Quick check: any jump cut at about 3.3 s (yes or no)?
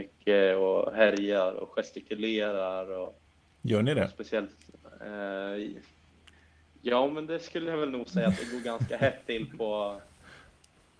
no